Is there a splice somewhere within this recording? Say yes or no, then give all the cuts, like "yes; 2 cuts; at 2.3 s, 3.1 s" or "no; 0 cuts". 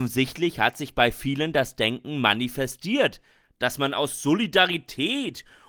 no; 0 cuts